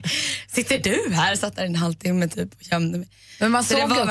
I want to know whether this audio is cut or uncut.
uncut